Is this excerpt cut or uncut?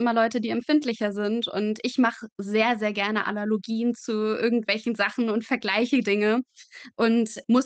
uncut